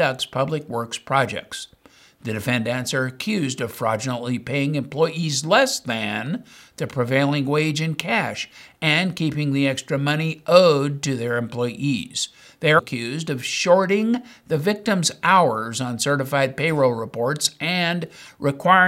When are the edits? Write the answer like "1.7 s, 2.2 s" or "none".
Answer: 12.8 s

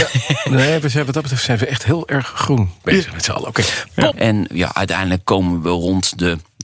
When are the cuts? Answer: 4.1 s

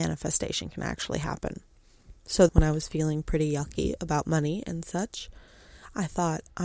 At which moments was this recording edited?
2.5 s

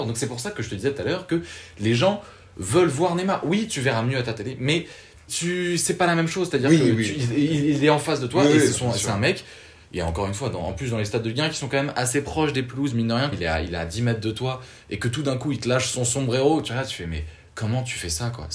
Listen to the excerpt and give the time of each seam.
5.3 s, 13.3 s

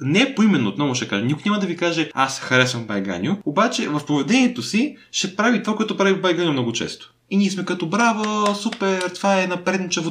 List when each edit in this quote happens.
none

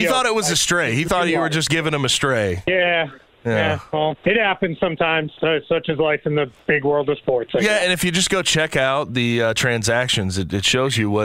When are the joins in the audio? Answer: 4.2 s

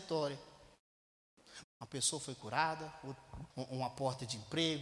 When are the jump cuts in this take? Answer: 1.6 s, 3.5 s

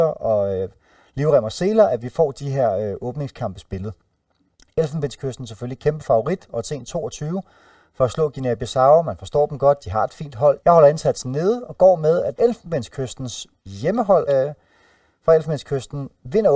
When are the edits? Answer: 10.6 s, 12.4 s, 14.3 s

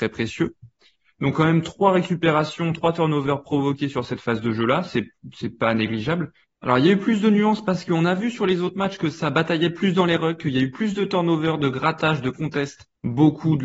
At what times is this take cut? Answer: 6.5 s

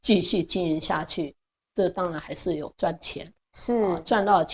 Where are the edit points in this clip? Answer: none

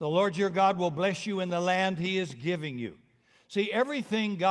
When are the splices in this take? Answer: none

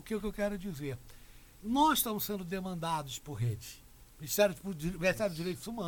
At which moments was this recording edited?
1.6 s

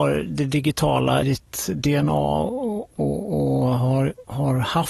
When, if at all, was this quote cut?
1.2 s

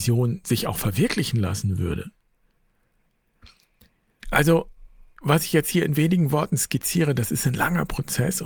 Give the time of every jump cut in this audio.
4.2 s

